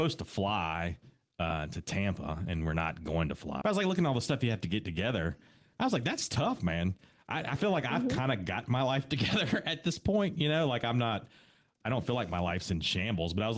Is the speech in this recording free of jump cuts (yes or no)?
no